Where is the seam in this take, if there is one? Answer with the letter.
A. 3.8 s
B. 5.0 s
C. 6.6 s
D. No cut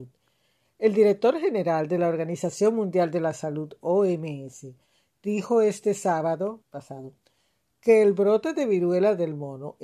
C